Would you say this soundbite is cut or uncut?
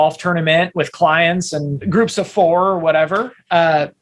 cut